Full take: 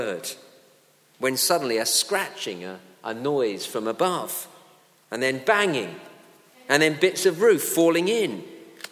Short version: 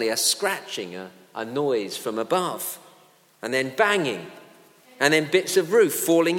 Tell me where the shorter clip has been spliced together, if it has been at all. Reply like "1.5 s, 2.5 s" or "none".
none